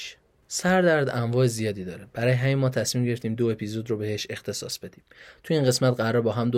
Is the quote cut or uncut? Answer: uncut